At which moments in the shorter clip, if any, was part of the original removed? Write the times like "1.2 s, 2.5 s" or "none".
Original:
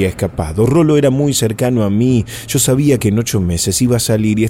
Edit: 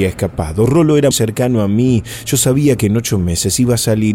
1.1 s